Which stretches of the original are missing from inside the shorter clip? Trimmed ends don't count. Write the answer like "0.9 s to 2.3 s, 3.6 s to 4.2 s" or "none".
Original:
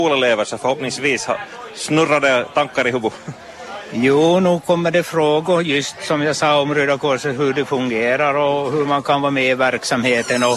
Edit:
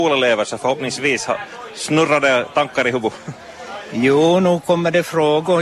none